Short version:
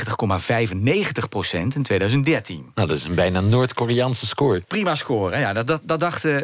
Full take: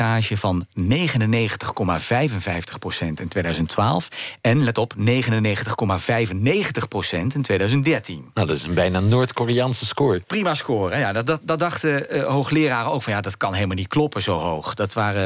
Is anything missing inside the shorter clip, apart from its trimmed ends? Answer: no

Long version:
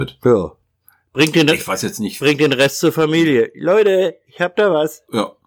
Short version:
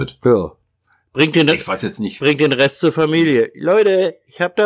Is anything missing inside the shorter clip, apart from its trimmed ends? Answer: no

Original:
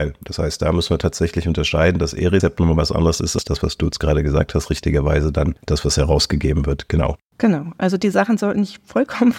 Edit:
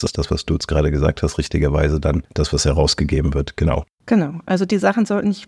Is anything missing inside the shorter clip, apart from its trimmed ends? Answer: no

